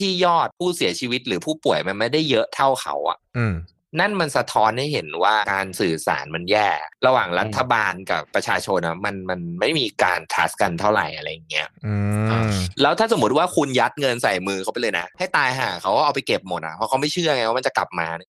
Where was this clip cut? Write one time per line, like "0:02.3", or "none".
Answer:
none